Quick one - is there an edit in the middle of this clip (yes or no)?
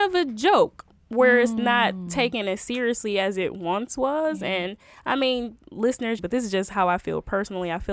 yes